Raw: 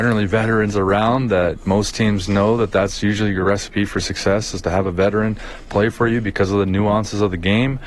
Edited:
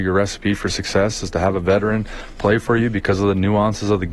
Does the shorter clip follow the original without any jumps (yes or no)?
yes